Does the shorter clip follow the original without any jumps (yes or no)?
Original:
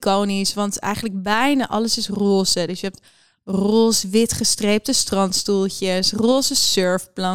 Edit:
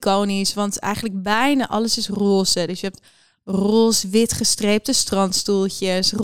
yes